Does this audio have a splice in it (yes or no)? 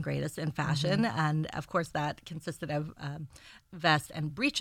yes